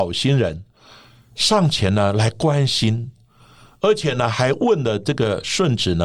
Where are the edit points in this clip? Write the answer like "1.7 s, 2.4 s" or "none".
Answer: none

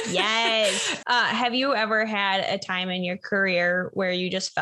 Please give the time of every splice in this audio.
1.0 s

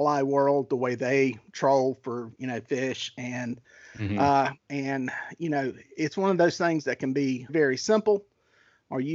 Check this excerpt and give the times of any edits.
4.7 s, 7.5 s

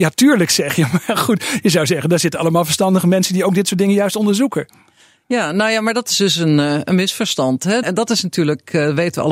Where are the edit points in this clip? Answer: 7.8 s

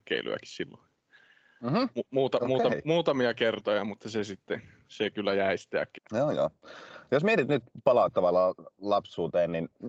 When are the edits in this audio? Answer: 6.0 s

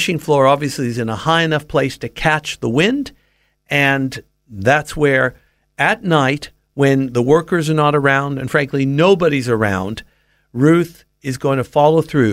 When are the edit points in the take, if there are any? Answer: none

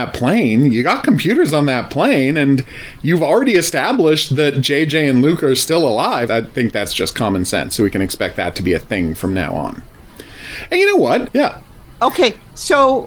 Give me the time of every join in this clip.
6.3 s, 11.3 s

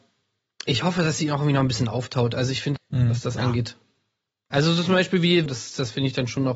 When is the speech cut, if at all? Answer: 2.8 s, 5.5 s

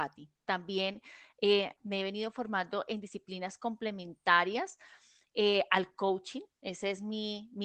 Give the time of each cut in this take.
1.8 s

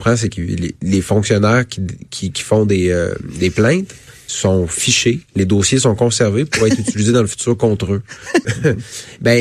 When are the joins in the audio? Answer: 8.4 s

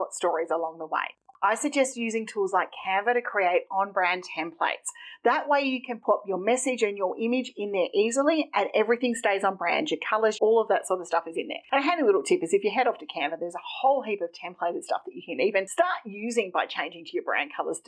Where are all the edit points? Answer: 10.3 s

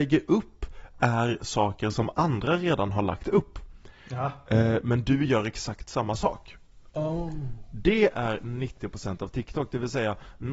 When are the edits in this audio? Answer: none

